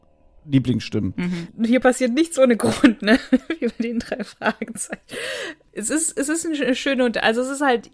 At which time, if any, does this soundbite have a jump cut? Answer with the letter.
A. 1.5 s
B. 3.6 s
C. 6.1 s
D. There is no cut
A